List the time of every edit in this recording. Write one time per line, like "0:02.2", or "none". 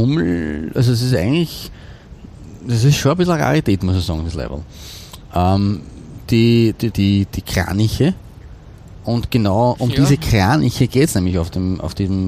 0:06.9